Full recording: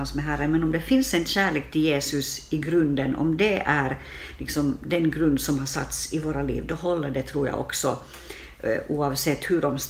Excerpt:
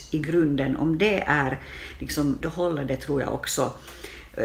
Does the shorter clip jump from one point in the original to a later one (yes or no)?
yes